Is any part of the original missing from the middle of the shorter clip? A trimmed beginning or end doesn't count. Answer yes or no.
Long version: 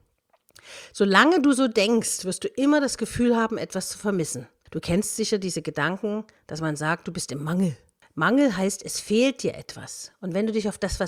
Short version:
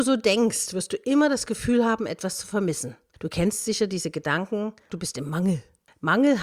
yes